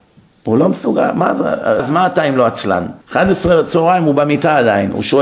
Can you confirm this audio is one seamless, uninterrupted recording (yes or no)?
no